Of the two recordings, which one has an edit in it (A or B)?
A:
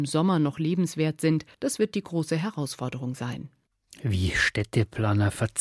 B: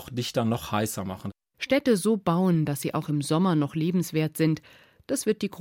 A